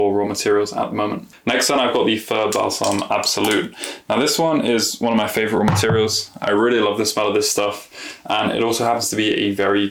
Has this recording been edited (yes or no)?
no